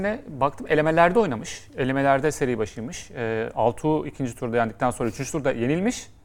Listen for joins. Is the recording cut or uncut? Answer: uncut